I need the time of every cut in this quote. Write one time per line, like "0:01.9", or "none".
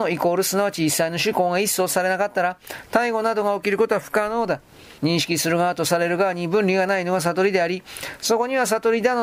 0:05.0